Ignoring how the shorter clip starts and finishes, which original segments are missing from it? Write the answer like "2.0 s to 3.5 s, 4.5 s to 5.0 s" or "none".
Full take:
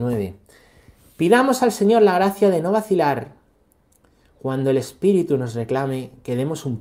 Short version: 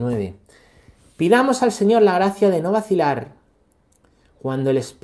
none

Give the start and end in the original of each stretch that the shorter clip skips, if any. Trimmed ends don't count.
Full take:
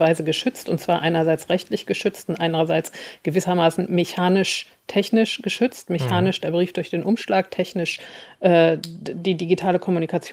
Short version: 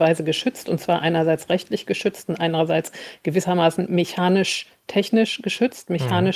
none

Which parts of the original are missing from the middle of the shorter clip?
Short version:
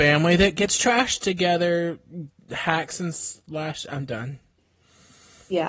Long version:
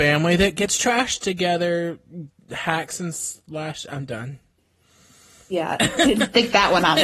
none

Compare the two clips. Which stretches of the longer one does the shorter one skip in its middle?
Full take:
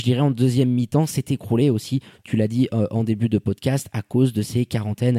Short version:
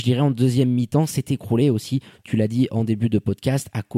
2.7 s to 2.9 s

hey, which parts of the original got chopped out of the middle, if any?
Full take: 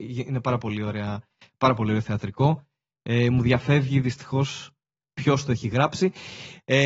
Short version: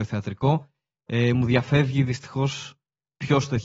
none

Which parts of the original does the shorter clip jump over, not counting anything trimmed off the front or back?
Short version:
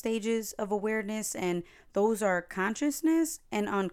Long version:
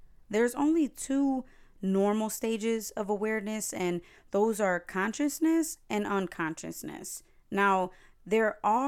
none

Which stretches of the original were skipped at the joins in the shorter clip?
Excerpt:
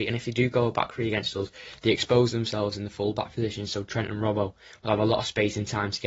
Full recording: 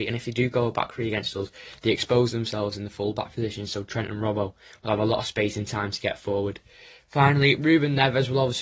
none

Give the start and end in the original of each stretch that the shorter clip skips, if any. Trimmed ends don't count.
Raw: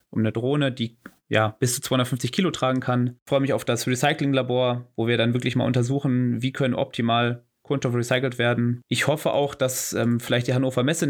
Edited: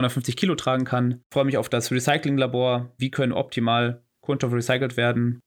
4.9 s to 6.4 s

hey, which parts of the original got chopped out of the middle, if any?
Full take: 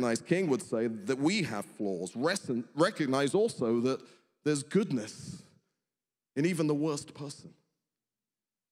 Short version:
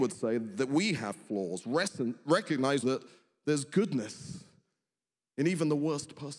3.3 s to 3.8 s

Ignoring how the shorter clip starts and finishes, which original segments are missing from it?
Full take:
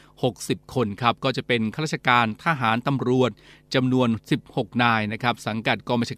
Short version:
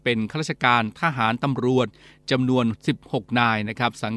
none

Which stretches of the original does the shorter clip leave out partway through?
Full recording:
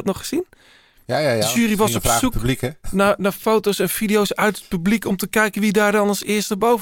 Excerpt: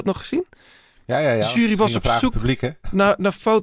none

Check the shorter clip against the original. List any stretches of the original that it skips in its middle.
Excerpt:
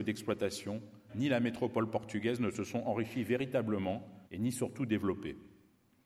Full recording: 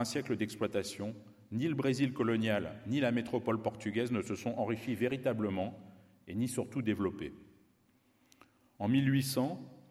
1.4 s to 2.8 s, 6.0 s to 6.2 s

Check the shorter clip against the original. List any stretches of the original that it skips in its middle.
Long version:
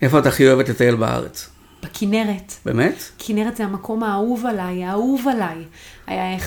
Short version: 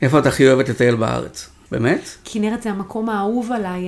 1.7 s to 2.6 s

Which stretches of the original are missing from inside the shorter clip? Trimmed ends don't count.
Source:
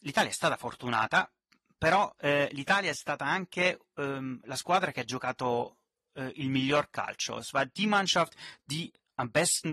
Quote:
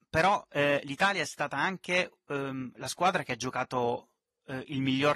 none

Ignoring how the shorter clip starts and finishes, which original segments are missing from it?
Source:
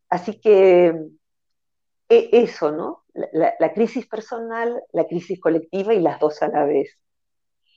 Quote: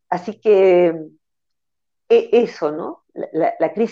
none

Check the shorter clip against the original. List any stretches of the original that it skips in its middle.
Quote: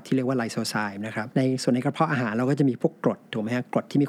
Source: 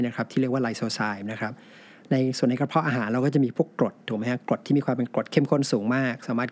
1.6 s to 2.1 s

